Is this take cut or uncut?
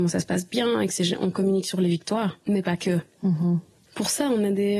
cut